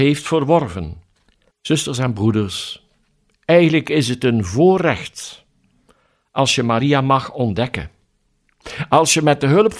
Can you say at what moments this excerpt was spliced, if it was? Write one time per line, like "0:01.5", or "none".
0:01.5